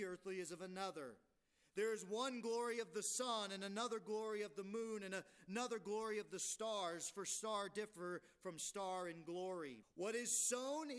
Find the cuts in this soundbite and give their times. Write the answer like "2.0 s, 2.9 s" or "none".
9.8 s